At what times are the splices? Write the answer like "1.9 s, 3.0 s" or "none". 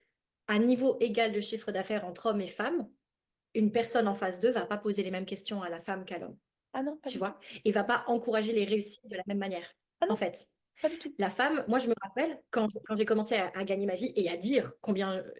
none